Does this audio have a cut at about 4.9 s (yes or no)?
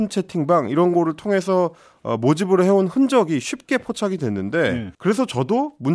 yes